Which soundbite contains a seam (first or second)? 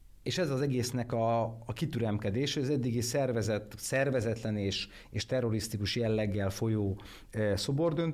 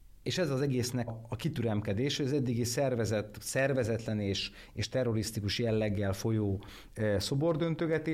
second